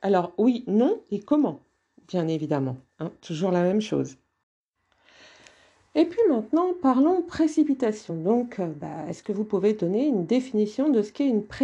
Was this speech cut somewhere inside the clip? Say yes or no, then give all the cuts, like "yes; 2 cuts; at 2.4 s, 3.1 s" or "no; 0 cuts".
no; 0 cuts